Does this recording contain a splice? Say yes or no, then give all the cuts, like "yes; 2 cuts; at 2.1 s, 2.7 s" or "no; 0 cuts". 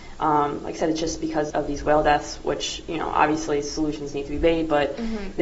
yes; 1 cut; at 1.5 s